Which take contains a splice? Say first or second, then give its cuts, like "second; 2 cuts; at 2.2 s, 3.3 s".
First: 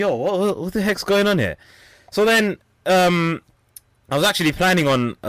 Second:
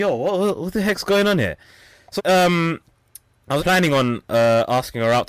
second; 2 cuts; at 2.2 s, 3.6 s